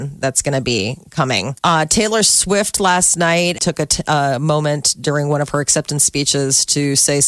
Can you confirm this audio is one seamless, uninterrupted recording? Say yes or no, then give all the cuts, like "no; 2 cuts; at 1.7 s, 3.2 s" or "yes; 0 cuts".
no; 2 cuts; at 1.6 s, 3.6 s